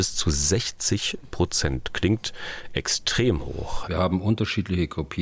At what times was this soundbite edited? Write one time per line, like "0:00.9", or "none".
0:03.8